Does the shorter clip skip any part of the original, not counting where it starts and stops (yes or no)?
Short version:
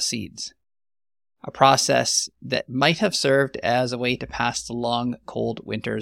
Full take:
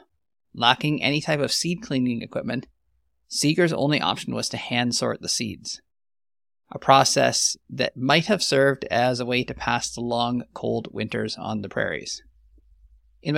no